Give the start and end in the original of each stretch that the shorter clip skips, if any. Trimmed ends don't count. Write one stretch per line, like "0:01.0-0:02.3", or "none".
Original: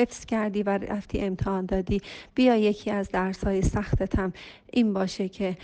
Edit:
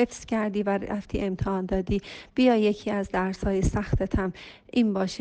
none